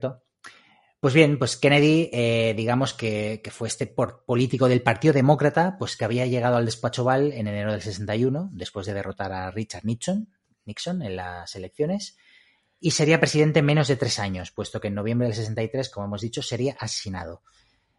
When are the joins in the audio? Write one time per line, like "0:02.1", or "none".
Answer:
none